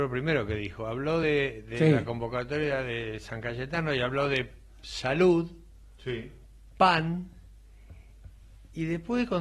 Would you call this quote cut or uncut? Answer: uncut